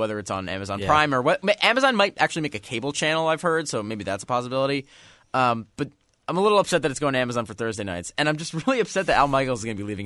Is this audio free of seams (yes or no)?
yes